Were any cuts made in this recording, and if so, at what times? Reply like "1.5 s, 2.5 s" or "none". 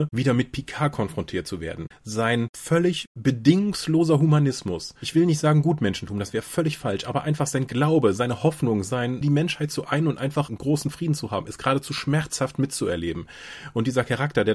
9.2 s